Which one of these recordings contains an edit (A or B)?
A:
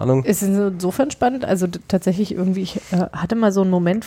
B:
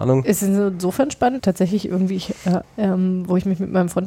B